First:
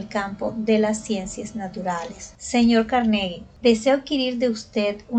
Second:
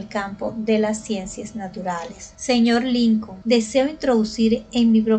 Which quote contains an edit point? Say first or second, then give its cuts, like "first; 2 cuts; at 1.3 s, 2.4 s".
first; 1 cut; at 2.4 s